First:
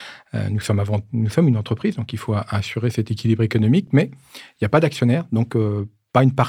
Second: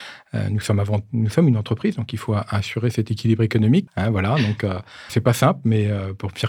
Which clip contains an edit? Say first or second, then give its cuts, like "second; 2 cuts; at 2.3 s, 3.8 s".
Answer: second; 2 cuts; at 3.9 s, 5.1 s